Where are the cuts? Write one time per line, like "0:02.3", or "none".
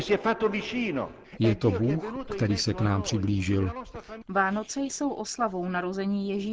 0:04.2